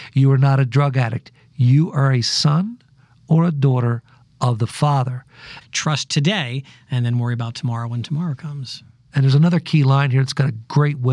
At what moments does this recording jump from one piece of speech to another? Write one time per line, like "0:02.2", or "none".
0:05.6